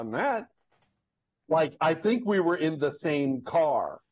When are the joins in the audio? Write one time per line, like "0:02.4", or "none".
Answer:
0:01.4